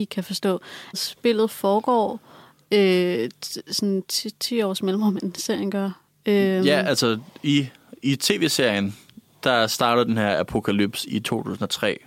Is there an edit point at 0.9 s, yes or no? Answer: yes